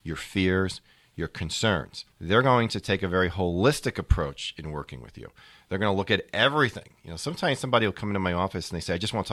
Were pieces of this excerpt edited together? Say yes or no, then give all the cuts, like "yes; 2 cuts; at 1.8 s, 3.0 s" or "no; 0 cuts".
yes; 1 cut; at 2.1 s